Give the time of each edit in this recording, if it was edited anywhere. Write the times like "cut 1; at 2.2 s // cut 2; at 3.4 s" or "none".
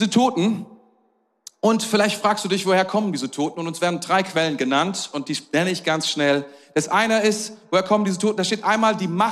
none